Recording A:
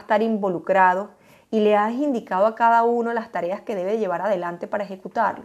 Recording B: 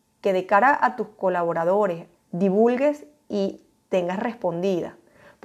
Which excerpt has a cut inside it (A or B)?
B